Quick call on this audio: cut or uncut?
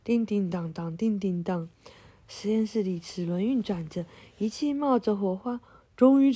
uncut